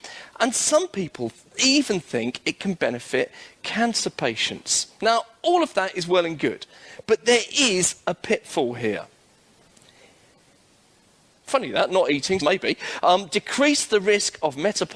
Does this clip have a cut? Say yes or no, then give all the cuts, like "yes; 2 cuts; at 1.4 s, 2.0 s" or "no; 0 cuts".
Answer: yes; 2 cuts; at 11.3 s, 12.4 s